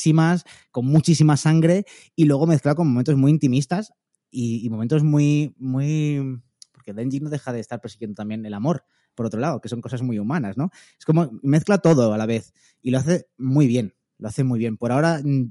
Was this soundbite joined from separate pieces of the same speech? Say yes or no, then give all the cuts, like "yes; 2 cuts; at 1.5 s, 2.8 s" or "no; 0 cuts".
no; 0 cuts